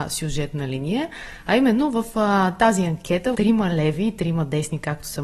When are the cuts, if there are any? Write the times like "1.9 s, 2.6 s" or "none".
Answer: 3.3 s